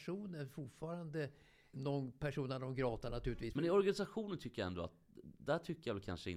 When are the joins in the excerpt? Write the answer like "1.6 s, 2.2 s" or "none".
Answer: 1.7 s, 3.5 s